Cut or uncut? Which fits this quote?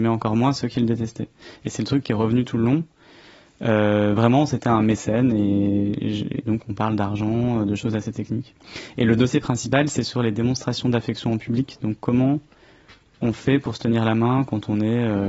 uncut